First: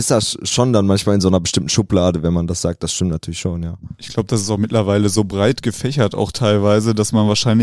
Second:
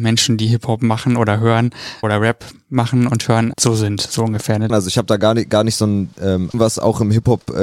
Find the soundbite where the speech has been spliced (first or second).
second